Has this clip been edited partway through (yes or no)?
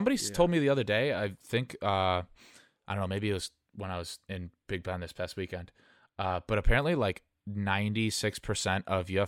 no